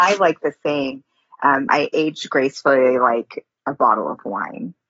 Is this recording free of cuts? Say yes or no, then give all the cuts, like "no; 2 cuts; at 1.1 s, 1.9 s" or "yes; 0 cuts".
no; 1 cut; at 1.7 s